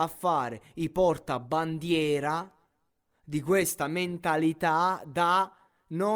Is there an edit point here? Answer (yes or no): no